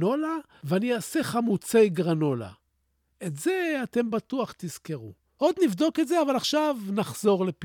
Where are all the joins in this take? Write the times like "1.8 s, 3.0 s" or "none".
none